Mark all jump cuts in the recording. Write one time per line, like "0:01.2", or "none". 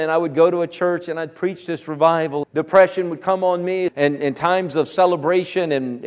0:02.4
0:03.9